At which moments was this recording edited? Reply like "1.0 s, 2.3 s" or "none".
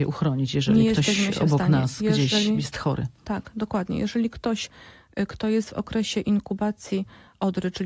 none